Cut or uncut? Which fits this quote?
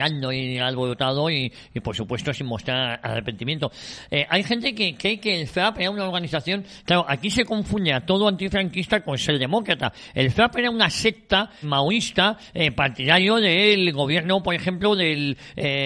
cut